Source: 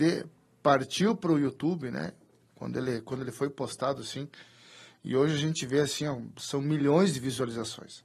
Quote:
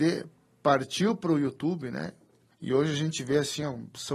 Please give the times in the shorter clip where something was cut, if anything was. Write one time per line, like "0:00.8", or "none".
0:02.5

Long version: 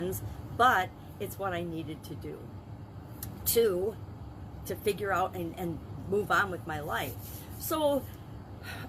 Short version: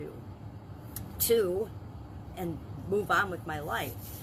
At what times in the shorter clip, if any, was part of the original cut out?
0:02.3

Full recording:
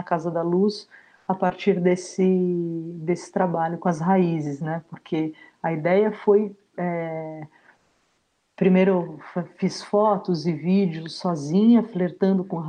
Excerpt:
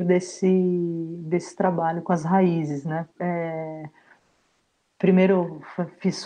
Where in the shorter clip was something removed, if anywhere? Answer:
0:03.1

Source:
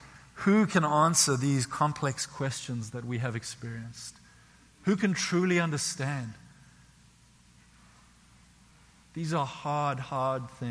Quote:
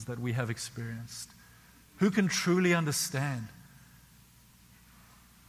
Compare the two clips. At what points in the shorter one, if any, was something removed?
none

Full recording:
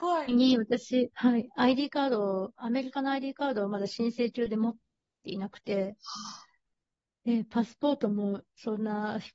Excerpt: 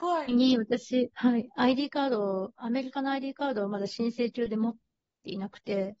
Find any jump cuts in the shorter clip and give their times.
none

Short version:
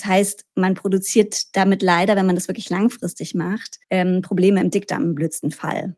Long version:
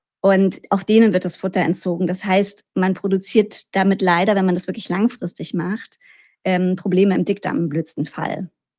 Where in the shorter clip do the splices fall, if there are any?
0:03.8

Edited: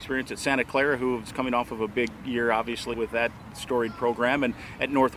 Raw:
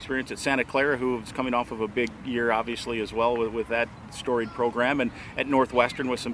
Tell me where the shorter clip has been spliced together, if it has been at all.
0:02.9

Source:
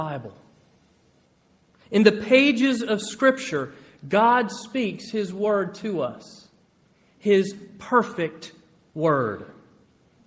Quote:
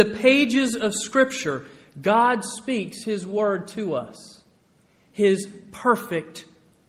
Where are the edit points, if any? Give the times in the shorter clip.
none

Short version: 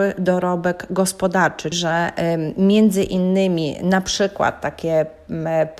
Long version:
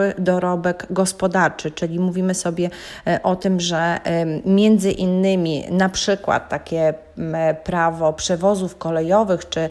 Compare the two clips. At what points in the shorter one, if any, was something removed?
0:01.7

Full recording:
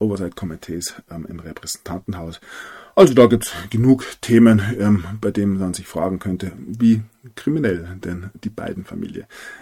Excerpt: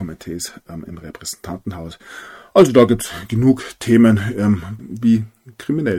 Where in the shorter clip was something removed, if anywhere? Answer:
0:04.8

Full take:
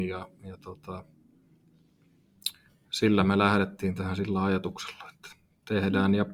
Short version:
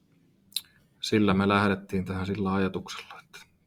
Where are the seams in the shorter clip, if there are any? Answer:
none

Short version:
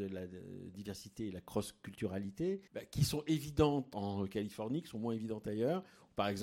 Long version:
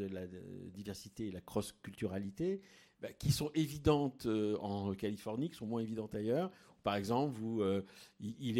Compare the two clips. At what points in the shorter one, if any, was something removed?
0:02.7
0:03.9

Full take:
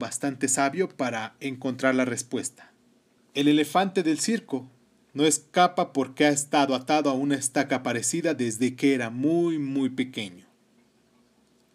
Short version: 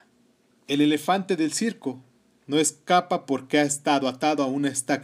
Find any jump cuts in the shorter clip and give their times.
none

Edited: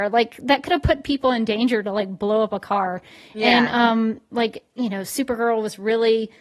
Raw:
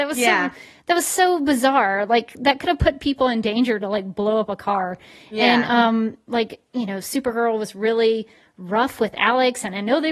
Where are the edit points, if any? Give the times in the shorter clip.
none

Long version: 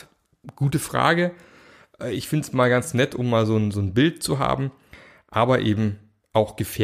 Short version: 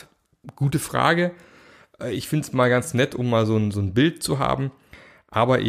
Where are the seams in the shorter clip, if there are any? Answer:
none

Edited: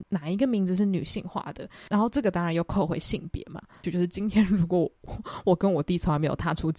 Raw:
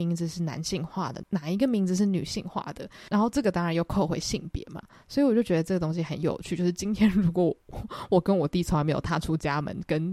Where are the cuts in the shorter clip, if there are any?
0:03.8

